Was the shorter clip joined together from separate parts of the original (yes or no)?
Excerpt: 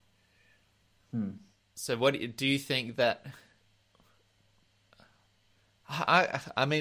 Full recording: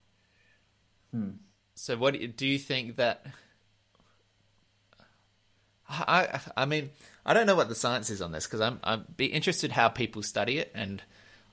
no